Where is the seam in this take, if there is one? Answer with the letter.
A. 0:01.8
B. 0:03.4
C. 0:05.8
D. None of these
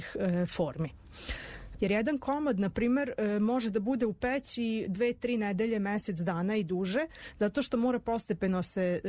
A